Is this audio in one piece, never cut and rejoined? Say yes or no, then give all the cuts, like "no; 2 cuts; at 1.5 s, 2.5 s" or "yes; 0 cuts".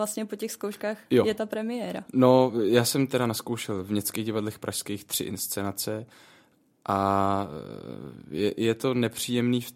no; 1 cut; at 1.1 s